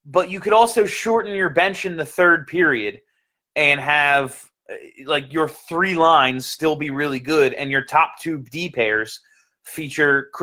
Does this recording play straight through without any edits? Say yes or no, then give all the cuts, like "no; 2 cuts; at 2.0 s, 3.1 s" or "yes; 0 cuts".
yes; 0 cuts